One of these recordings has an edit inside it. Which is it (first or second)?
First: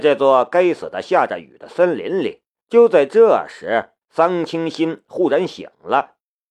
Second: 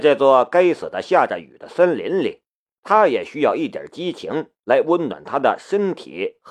first